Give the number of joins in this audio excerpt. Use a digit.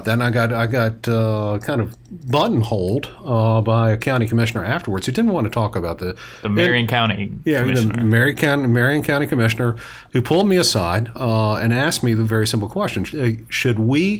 0